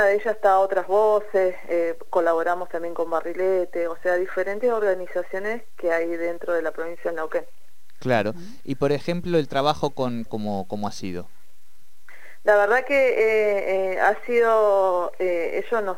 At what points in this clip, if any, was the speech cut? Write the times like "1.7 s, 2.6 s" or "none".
10.3 s